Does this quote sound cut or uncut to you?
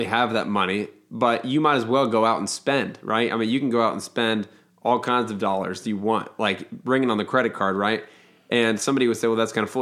uncut